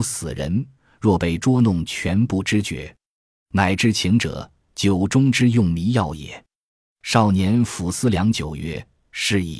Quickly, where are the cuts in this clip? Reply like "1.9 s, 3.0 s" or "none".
none